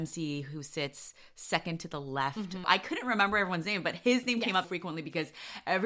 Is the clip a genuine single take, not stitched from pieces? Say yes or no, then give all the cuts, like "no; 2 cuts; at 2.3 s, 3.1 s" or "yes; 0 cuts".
no; 2 cuts; at 2.6 s, 4.6 s